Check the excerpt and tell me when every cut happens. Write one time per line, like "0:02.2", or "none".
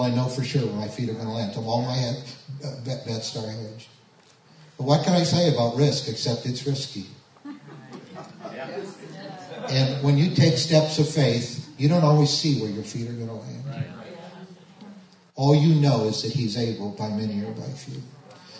none